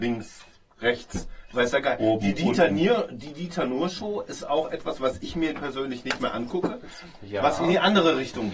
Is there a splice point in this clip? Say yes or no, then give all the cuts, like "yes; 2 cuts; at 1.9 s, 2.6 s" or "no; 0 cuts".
yes; 1 cut; at 7.6 s